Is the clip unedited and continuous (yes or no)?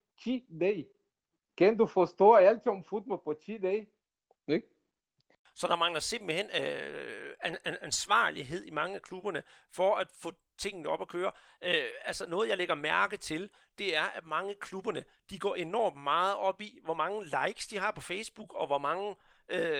yes